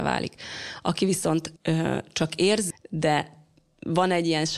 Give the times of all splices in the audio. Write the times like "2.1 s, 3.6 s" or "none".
1.6 s, 2.7 s